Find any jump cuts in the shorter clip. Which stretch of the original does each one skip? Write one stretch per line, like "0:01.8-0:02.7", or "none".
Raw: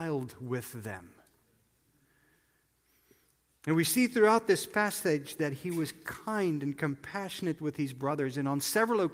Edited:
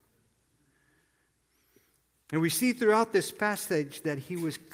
none